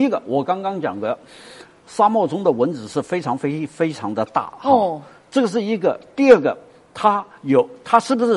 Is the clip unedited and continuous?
yes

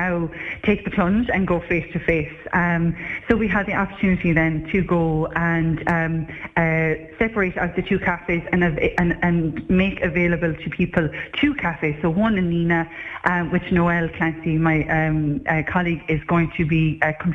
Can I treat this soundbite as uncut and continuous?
yes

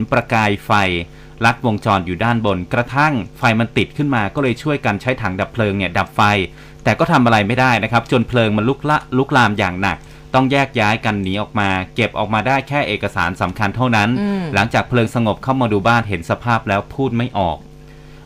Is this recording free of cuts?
no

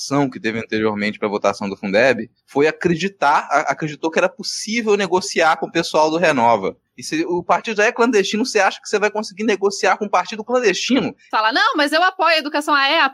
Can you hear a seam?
yes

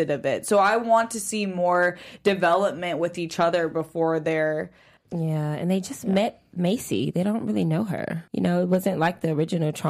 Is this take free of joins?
no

